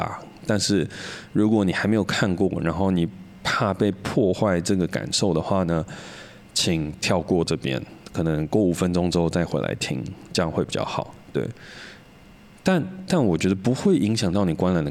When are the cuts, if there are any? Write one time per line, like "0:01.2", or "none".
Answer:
0:13.1